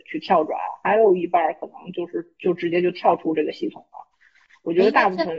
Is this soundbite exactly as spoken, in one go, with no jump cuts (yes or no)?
yes